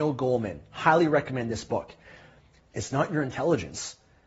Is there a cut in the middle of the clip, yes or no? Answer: yes